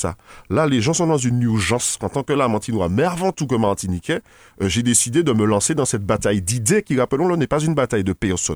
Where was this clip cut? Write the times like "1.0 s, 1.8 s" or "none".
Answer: 2.0 s